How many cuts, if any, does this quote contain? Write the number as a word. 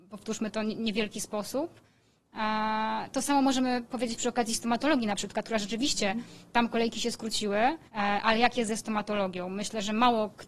one